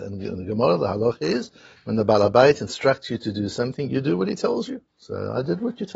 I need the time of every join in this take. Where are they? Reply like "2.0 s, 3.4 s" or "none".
4.9 s